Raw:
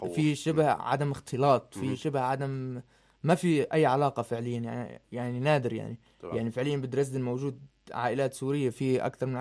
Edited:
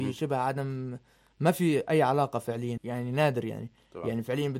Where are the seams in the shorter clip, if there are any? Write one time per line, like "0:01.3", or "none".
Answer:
0:02.8